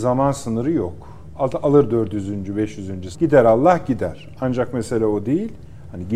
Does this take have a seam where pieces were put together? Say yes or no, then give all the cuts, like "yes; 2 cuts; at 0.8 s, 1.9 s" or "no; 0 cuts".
yes; 1 cut; at 3.1 s